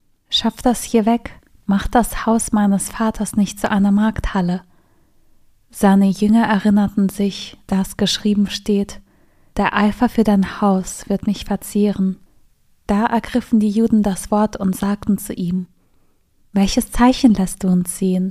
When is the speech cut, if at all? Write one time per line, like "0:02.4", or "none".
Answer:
none